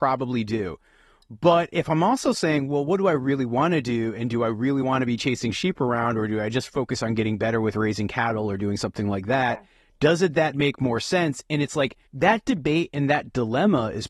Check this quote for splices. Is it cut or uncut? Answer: cut